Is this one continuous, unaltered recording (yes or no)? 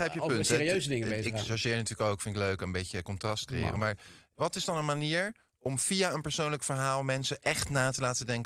yes